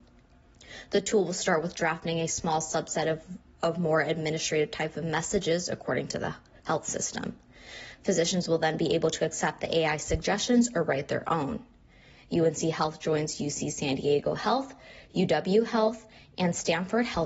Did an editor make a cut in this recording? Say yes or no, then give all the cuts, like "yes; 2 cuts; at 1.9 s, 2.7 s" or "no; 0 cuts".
no; 0 cuts